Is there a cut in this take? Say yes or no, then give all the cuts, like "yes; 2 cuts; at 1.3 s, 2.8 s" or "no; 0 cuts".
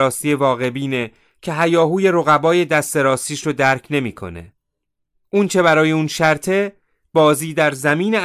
no; 0 cuts